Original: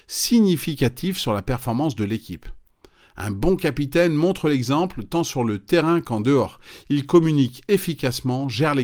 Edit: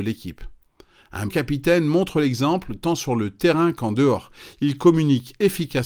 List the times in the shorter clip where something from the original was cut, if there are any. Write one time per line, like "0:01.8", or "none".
0:01.3